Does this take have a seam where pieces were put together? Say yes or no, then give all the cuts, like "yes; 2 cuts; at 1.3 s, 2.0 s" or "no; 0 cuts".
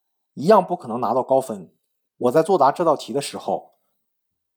yes; 1 cut; at 2.1 s